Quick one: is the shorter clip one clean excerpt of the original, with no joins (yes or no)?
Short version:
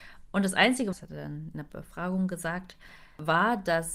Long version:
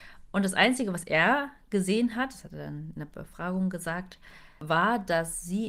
no